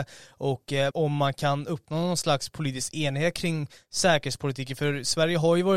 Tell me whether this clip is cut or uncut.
cut